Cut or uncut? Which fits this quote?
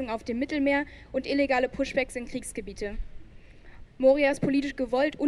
cut